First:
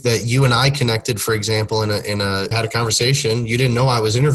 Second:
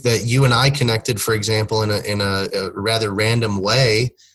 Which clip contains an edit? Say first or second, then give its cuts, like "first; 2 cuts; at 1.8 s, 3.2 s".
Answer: first; 1 cut; at 2.5 s